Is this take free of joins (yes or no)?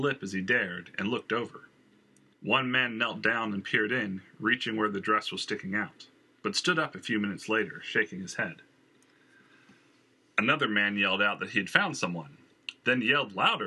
no